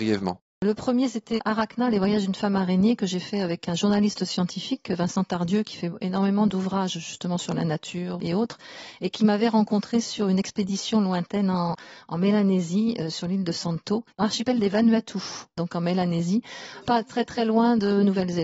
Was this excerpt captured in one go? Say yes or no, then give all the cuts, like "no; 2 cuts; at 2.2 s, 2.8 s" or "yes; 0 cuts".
yes; 0 cuts